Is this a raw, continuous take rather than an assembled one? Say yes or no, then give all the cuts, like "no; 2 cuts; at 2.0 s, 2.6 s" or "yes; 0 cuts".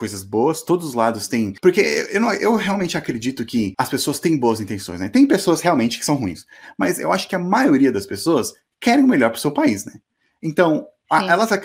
yes; 0 cuts